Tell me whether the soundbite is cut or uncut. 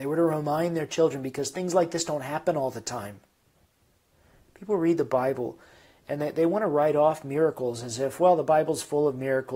uncut